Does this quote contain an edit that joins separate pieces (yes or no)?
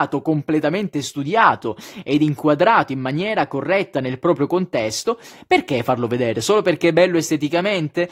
no